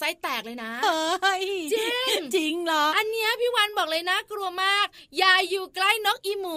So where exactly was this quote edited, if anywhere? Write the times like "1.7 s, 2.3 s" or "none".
2.9 s